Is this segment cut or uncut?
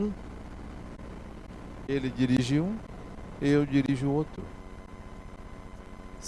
cut